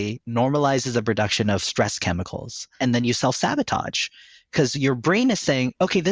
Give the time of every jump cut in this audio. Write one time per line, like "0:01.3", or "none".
0:02.8